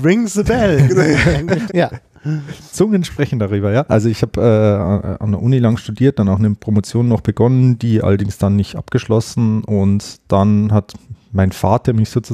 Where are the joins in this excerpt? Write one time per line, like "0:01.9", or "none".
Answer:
0:01.7
0:03.9